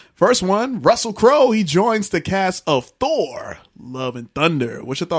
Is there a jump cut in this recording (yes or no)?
no